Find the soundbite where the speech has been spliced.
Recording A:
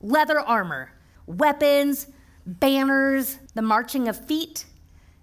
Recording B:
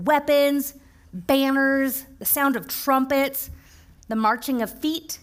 A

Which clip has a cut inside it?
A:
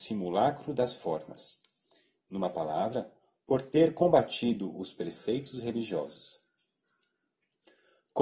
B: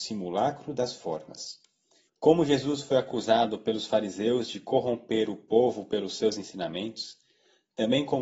B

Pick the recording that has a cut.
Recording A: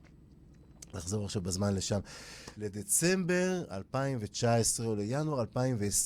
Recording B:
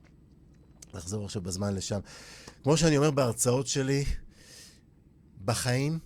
A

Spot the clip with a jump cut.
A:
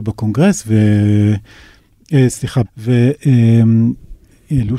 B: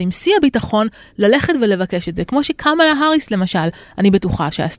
A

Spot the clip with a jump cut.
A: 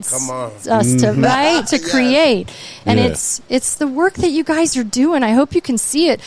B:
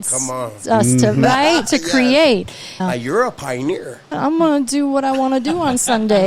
B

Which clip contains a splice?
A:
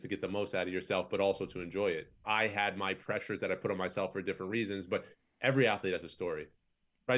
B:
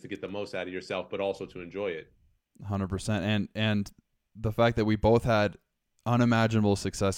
A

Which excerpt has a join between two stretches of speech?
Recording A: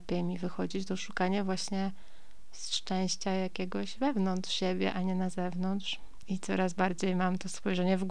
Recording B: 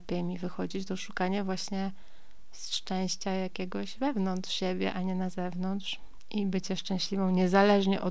A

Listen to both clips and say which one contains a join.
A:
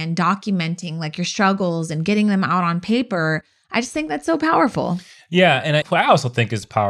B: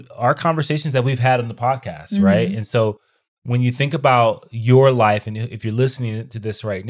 A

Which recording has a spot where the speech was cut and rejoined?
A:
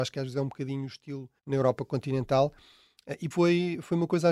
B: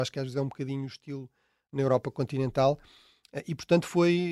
A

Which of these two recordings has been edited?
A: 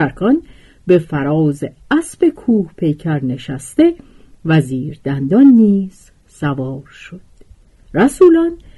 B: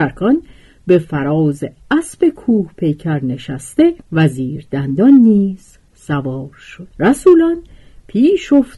B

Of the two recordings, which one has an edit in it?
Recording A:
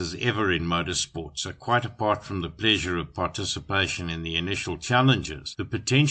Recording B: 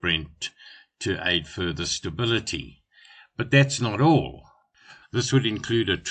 B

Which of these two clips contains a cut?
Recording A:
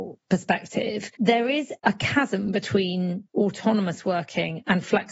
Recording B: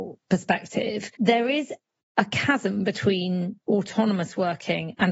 A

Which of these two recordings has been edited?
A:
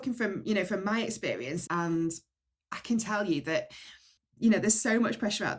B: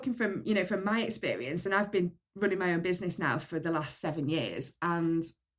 A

